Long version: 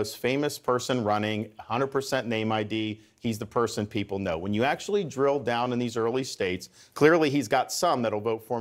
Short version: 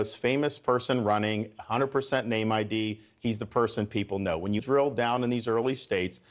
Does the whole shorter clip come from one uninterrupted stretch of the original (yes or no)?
no